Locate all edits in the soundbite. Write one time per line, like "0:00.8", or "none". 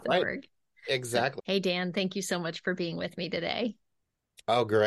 0:01.4